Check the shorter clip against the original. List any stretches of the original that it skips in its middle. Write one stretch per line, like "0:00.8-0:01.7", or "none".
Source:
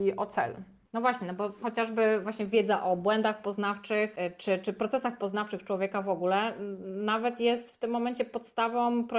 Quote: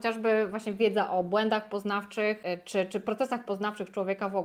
none